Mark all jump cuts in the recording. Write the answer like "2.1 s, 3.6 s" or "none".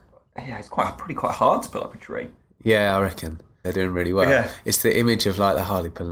3.6 s